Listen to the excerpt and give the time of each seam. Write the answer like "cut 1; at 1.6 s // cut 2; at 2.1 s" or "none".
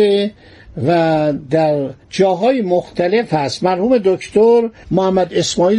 cut 1; at 2.0 s